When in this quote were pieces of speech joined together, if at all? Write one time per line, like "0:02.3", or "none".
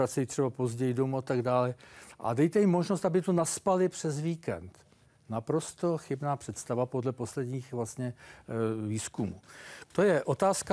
0:09.8